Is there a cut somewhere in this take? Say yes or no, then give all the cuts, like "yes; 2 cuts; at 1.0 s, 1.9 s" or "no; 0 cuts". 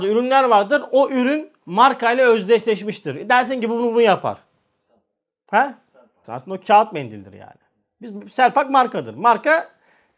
yes; 1 cut; at 6.2 s